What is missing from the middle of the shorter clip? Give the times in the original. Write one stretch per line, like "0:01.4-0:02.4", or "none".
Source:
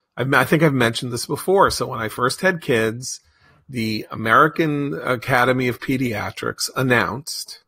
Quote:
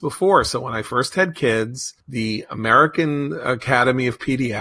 0:03.3-0:03.6